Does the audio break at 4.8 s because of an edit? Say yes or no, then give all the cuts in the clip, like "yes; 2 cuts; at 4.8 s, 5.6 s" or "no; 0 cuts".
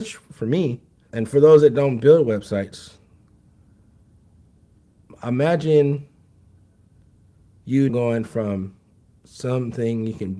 no; 2 cuts; at 1.1 s, 7.9 s